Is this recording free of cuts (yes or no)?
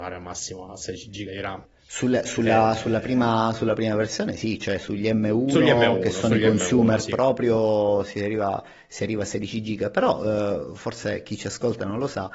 yes